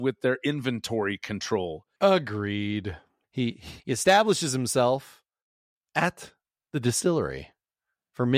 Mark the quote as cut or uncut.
cut